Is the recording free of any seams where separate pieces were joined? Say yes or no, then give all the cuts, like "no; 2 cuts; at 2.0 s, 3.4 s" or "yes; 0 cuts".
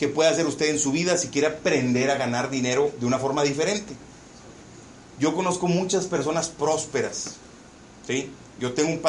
yes; 0 cuts